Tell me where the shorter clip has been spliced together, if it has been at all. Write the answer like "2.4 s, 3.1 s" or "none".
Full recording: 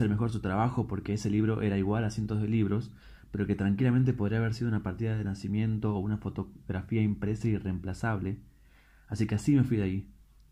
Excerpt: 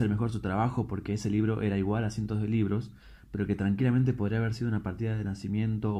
none